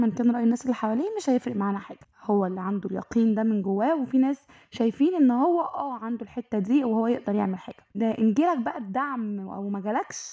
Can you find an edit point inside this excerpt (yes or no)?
yes